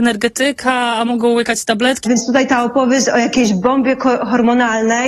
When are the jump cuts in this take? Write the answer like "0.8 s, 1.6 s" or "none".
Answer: 2.0 s